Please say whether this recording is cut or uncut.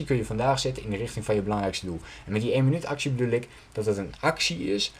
uncut